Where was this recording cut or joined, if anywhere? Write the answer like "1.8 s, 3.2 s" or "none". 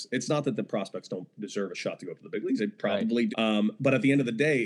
3.3 s